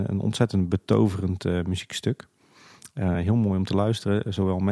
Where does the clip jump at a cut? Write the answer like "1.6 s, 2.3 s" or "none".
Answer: none